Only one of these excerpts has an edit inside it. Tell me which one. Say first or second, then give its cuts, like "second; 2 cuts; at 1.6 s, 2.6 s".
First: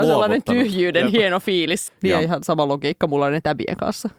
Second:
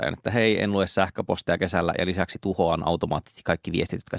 first; 1 cut; at 1.9 s